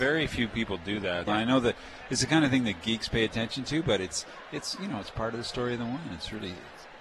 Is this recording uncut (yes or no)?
no